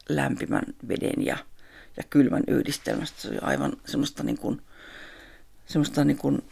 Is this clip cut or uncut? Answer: uncut